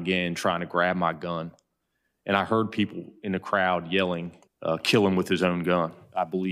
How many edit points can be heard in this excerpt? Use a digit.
1